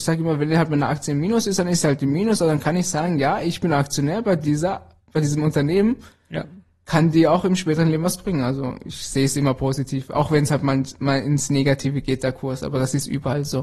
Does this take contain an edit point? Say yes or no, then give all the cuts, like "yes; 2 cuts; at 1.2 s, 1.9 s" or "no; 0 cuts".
no; 0 cuts